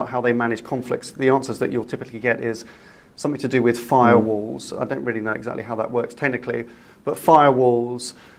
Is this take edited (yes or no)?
no